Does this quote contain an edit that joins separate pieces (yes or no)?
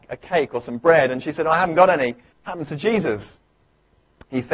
yes